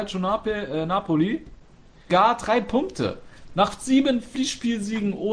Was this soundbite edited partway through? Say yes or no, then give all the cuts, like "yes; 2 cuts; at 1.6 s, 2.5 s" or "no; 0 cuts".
yes; 2 cuts; at 2.1 s, 3.5 s